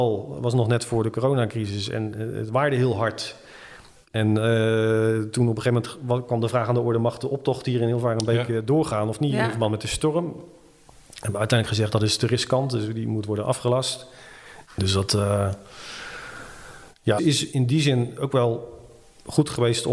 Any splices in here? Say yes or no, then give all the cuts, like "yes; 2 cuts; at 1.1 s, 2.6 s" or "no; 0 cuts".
yes; 2 cuts; at 14.7 s, 17.2 s